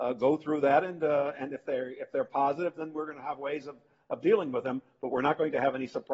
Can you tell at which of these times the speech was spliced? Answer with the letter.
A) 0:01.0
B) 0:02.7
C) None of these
C